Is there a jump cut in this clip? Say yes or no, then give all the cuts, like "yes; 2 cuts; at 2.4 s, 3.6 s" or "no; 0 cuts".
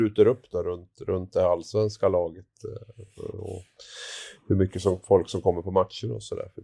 no; 0 cuts